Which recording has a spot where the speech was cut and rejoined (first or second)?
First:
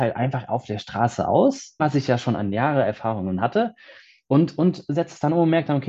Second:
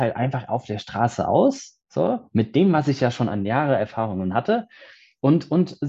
first